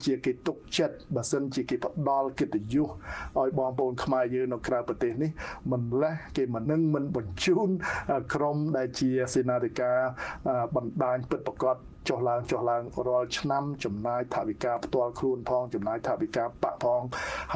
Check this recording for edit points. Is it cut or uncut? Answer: cut